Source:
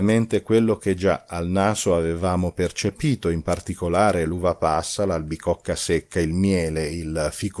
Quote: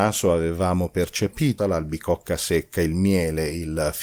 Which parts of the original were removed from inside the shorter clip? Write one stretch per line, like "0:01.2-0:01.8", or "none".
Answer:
0:03.2-0:05.0